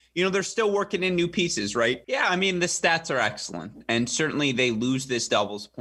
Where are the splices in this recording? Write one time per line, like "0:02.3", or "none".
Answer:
0:02.0